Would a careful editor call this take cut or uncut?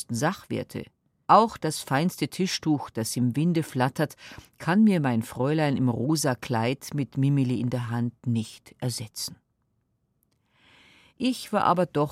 cut